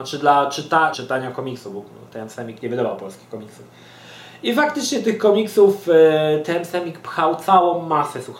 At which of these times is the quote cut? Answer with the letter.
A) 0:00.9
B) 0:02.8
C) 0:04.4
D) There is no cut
A